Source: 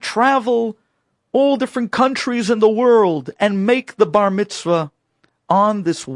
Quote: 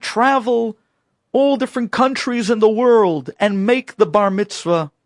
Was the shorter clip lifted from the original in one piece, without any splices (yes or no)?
yes